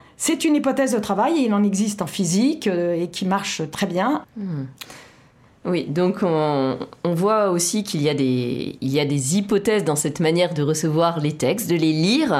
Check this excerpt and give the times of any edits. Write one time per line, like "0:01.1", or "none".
0:04.2